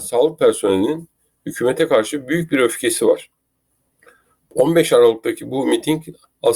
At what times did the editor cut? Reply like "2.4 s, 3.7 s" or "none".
none